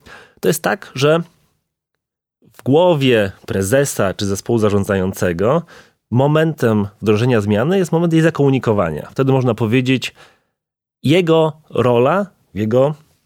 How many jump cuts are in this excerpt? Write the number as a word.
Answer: zero